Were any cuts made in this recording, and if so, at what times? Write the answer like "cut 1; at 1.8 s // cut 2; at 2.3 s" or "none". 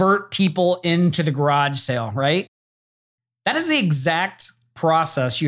none